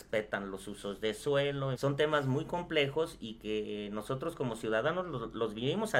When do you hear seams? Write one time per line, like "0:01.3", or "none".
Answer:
0:01.7